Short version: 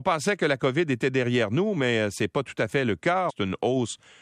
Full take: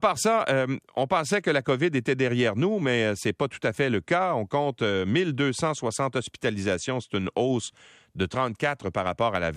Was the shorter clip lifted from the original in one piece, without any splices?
no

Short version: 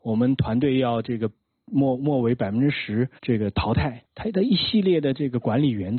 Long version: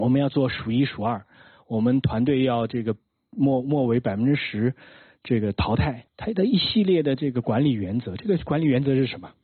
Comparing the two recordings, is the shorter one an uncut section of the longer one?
no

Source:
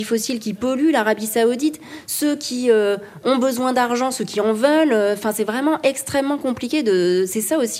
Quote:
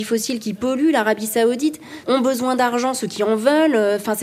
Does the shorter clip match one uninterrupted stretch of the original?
no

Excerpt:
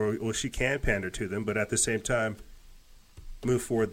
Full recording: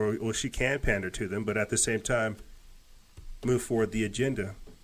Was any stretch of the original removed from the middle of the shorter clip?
no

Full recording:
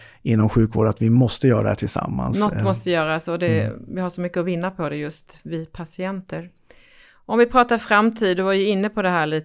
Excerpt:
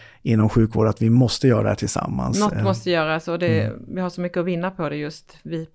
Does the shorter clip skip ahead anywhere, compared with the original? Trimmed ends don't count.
no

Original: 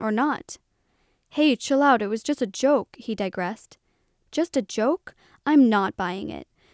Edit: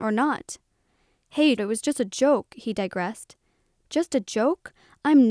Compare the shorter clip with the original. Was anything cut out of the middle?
yes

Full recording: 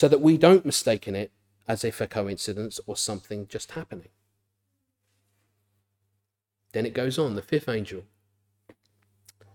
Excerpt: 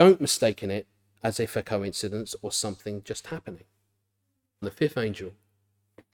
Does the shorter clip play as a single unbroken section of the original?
no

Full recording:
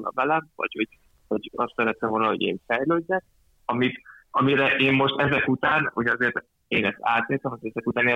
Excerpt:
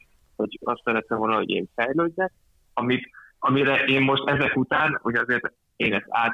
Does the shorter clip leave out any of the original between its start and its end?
no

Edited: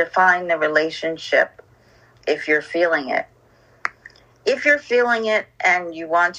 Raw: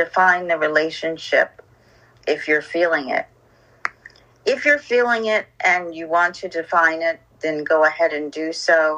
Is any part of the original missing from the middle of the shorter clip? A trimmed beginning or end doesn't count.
no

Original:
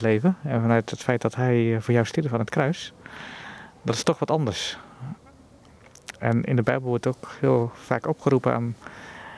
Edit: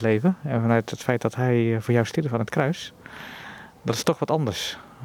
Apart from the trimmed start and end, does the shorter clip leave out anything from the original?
no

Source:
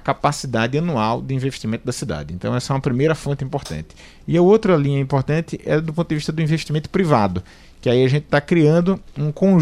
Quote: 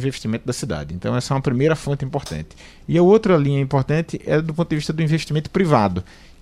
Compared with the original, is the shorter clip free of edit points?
yes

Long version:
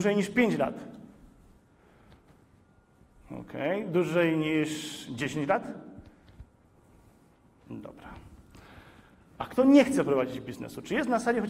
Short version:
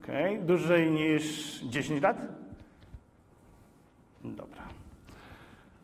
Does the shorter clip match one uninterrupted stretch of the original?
yes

